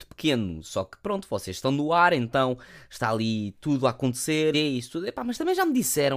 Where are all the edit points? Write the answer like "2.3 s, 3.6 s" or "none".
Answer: 4.5 s